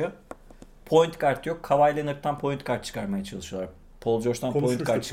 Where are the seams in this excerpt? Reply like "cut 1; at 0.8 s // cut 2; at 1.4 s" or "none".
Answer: none